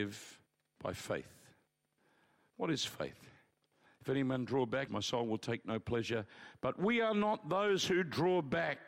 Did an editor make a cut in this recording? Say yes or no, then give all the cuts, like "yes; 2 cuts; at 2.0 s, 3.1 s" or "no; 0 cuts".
yes; 1 cut; at 4.9 s